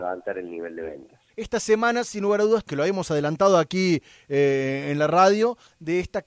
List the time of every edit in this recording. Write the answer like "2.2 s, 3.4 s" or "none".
1.3 s, 2.7 s